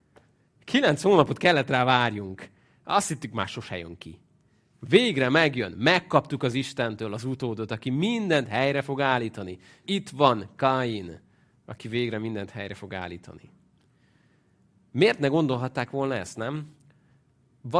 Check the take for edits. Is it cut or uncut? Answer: cut